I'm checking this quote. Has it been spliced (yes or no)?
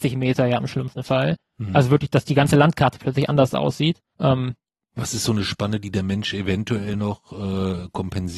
yes